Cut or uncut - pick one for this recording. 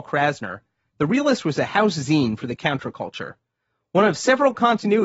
uncut